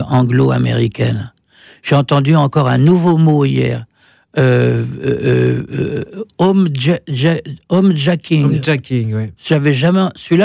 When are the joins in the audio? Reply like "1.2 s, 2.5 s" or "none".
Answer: none